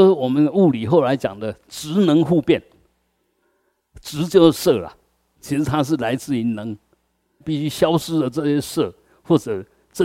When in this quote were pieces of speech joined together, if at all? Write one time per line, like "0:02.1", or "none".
0:07.4